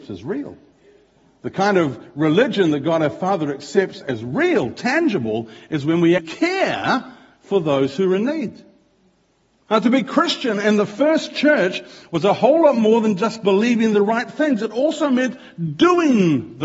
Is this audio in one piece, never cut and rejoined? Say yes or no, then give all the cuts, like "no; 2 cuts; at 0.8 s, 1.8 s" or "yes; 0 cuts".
no; 1 cut; at 6.2 s